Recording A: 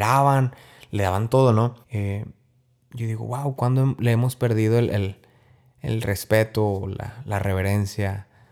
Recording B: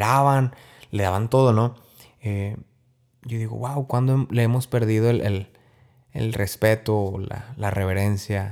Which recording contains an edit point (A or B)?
A